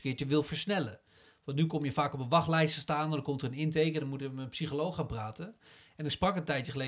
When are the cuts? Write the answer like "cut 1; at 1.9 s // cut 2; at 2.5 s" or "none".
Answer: none